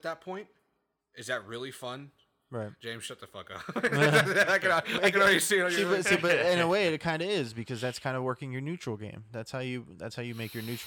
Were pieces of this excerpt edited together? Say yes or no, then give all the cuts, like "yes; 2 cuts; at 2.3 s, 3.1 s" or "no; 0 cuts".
no; 0 cuts